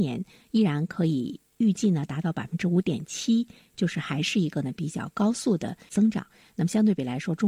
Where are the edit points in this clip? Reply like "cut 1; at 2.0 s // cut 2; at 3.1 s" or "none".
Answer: none